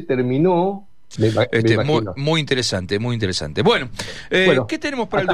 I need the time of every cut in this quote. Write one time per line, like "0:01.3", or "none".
0:01.2